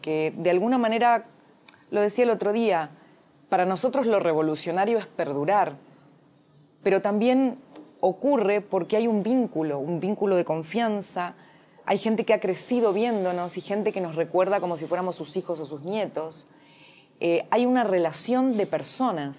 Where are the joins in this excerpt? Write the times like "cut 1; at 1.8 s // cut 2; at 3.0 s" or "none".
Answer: none